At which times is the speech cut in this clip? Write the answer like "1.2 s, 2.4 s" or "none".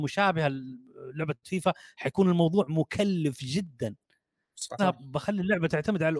4.8 s